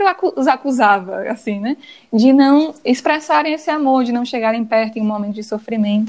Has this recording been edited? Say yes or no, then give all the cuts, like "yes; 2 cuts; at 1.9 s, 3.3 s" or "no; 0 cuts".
no; 0 cuts